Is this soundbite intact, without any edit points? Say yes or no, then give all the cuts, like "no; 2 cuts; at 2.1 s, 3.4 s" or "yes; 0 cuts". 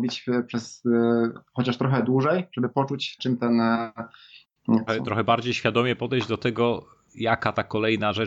no; 2 cuts; at 3.2 s, 4.9 s